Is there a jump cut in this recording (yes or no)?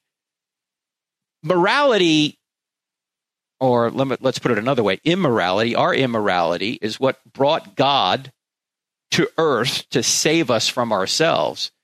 no